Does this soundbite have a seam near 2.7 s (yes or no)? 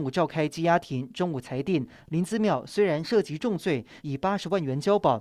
no